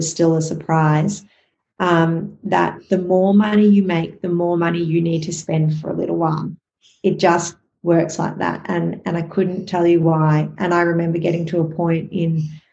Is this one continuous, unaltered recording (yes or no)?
yes